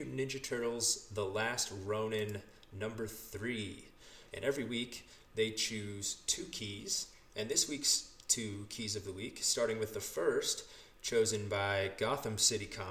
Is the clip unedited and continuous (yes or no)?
no